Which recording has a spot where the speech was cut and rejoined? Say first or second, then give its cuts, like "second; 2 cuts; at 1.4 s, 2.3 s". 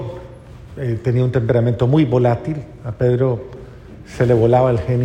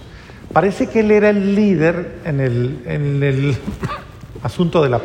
second; 1 cut; at 2.9 s